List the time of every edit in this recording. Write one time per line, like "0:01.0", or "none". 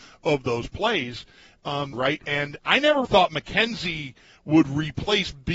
0:01.9
0:03.0